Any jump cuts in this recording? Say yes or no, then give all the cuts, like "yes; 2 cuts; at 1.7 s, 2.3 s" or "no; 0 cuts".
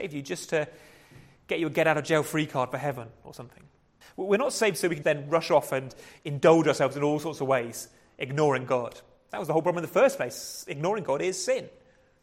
yes; 2 cuts; at 4.0 s, 5.0 s